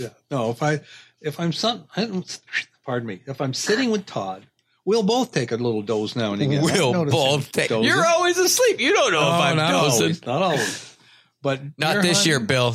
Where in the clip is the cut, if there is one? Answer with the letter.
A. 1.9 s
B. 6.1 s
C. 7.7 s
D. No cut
C